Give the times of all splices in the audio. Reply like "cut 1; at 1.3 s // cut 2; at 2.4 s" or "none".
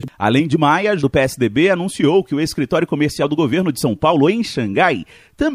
cut 1; at 1.0 s